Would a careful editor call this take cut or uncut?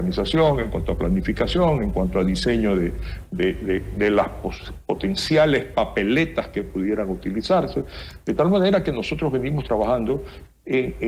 uncut